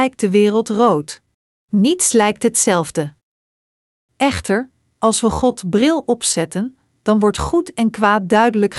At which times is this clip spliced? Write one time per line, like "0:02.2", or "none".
0:01.5